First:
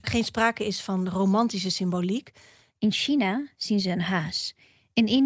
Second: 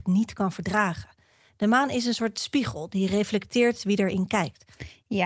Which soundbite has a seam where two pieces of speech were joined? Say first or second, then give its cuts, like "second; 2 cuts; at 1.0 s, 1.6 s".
first; 1 cut; at 2.7 s